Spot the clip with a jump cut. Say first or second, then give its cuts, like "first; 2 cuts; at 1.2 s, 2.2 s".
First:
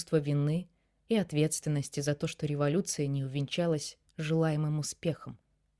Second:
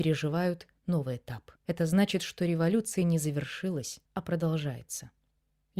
second; 2 cuts; at 1.6 s, 4.1 s